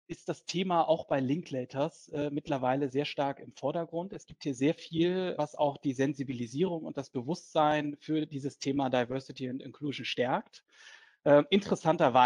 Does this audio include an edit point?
yes; 1 cut; at 5.4 s

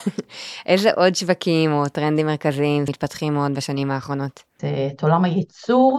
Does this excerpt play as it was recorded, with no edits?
no; 2 cuts; at 2.9 s, 4.6 s

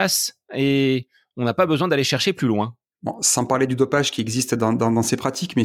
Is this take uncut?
yes; 0 cuts

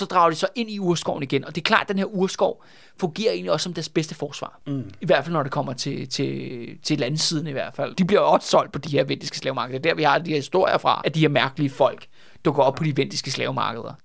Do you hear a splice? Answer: yes; 1 cut; at 7.9 s

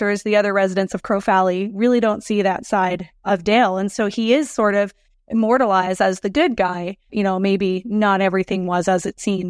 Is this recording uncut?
no; 1 cut; at 7.1 s

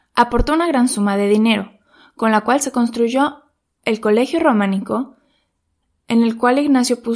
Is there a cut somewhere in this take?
no; 0 cuts

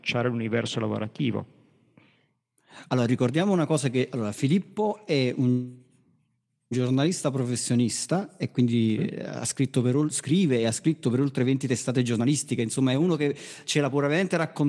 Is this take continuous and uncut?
yes; 0 cuts

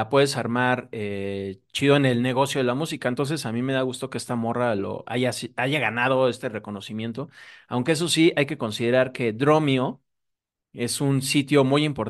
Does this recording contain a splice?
no; 0 cuts

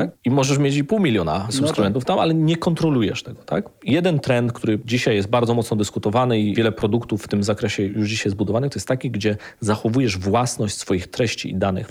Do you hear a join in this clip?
no; 0 cuts

